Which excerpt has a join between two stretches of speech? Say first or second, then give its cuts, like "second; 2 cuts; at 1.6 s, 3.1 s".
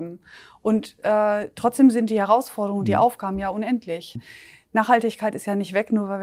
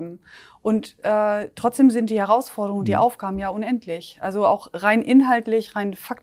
first; 1 cut; at 4.1 s